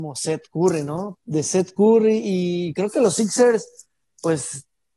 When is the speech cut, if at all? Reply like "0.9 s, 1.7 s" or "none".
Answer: 1.2 s

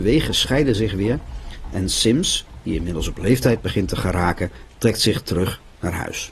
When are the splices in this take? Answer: none

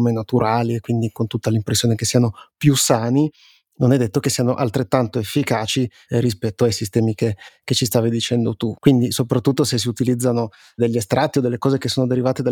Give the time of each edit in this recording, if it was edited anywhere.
8.8 s

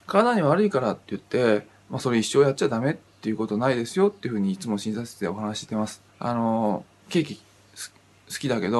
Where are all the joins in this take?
6.1 s

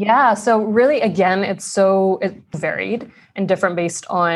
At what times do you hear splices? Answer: 2.5 s

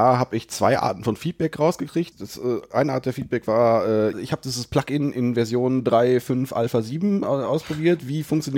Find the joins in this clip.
2.1 s, 4.1 s

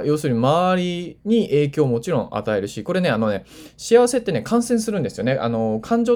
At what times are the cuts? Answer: none

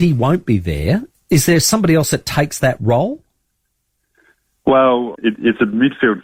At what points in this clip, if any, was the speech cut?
5.1 s

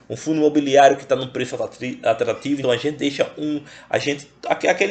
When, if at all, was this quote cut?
2.6 s

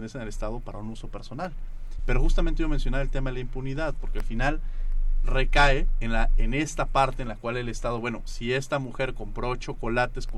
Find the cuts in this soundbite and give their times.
2.0 s

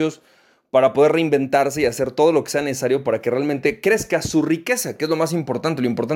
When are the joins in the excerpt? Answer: none

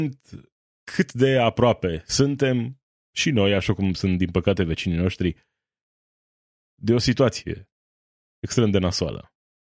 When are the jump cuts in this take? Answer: none

